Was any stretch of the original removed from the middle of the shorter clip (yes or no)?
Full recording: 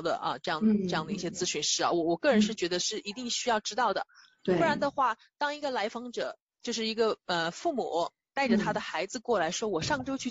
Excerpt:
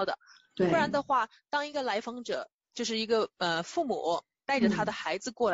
no